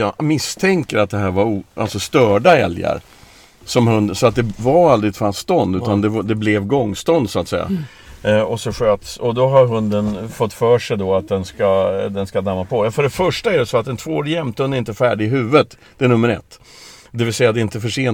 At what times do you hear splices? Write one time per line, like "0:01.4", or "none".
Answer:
none